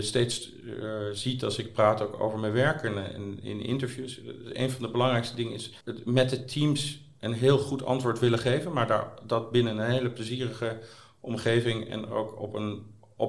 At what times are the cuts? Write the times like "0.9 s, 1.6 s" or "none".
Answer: 5.8 s